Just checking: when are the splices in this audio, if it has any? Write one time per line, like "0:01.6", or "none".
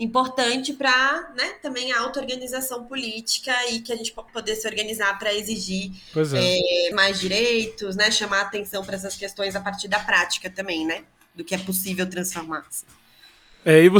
0:04.3
0:06.9